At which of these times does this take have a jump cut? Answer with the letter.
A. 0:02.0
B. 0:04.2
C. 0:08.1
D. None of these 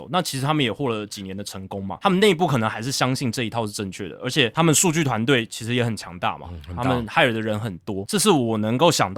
C